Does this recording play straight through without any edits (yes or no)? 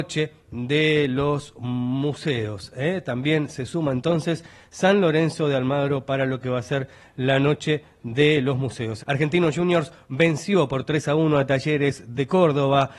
no